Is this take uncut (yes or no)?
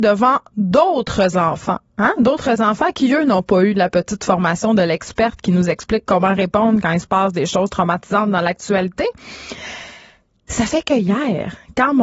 yes